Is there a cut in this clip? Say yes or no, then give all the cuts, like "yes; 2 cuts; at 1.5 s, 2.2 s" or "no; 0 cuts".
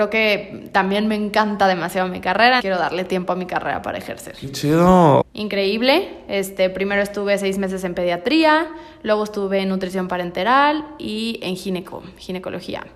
yes; 2 cuts; at 2.6 s, 5.2 s